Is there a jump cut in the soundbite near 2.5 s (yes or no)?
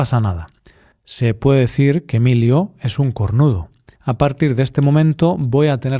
no